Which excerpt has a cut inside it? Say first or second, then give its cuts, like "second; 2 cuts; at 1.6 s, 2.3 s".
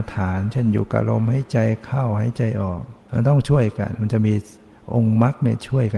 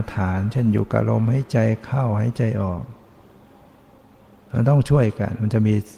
first; 1 cut; at 3.0 s